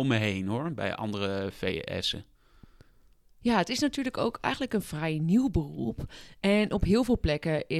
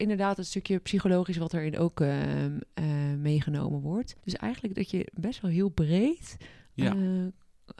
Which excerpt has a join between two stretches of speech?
second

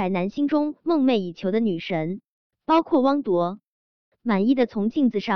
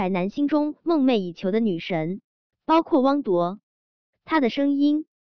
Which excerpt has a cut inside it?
second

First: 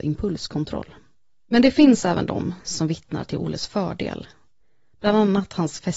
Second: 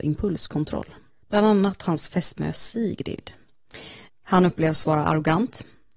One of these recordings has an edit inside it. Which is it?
second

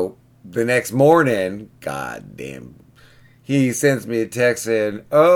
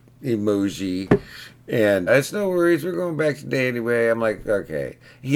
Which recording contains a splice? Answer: second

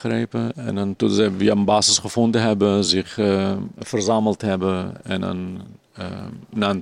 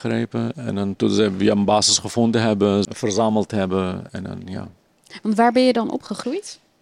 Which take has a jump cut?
second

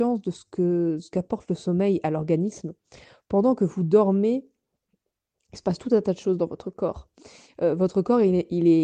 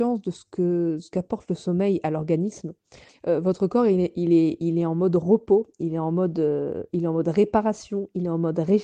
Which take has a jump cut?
second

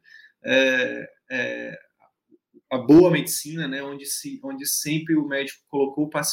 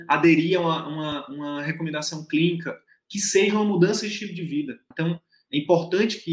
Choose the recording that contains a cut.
second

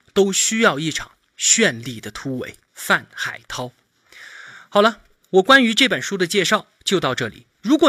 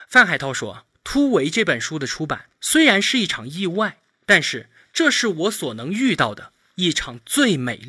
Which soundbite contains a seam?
first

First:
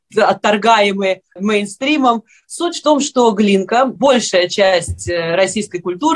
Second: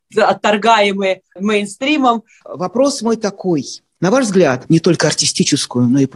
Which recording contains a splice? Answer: second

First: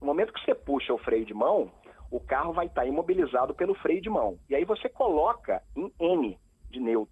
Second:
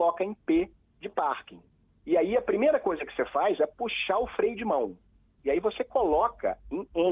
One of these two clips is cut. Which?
second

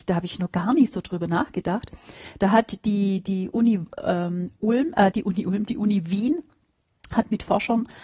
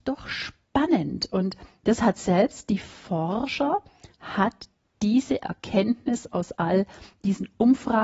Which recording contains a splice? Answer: first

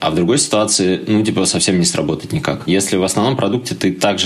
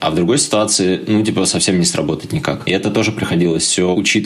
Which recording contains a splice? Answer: first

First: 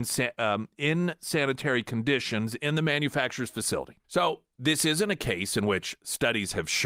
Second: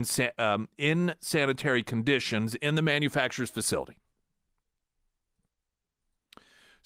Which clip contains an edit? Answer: first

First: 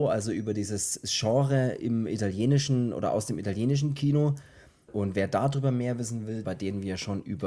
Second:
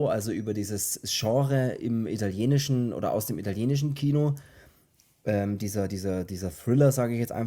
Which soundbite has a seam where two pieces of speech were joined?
first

